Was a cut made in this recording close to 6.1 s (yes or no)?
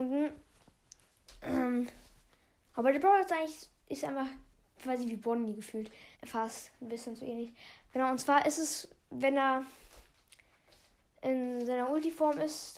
yes